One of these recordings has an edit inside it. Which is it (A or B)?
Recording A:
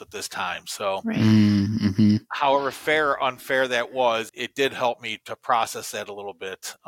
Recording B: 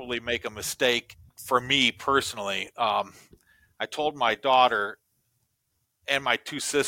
A